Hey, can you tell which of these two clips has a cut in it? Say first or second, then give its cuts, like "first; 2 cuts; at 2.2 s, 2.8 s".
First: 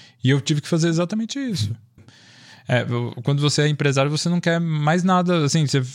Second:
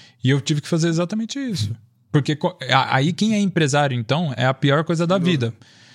first; 1 cut; at 2.0 s